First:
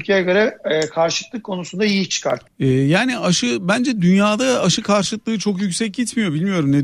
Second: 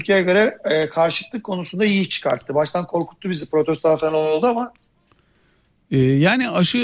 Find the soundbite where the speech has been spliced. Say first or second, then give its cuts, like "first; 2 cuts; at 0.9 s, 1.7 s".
first; 1 cut; at 2.5 s